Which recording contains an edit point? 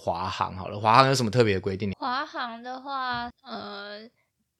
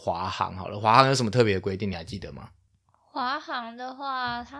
first; 2 cuts; at 1.9 s, 3.3 s

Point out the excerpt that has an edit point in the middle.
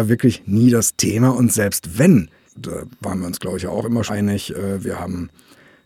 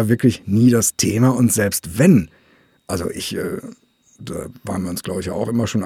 first; 2 cuts; at 2.5 s, 4.1 s

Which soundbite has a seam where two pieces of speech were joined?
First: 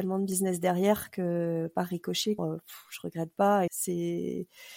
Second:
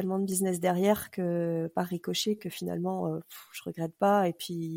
first; 2 cuts; at 2.4 s, 3.7 s

